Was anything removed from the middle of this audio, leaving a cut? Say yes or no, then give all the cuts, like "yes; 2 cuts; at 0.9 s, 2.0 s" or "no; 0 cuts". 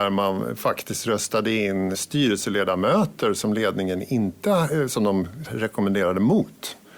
yes; 2 cuts; at 1.9 s, 5.4 s